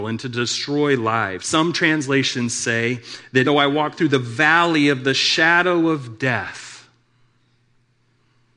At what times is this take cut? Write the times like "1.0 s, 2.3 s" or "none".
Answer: 1.4 s, 3.4 s